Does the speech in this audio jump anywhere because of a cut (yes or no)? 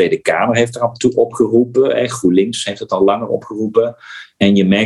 no